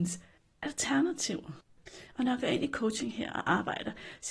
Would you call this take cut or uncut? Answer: uncut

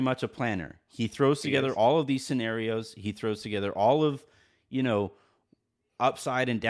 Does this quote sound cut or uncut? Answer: uncut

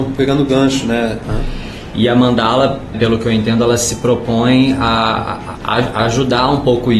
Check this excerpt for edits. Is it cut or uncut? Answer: cut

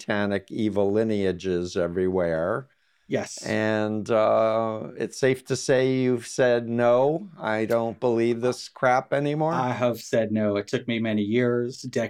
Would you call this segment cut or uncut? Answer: uncut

